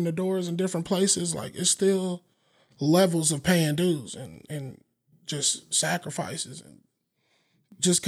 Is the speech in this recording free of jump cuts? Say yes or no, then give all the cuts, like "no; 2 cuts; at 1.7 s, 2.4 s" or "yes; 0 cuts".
yes; 0 cuts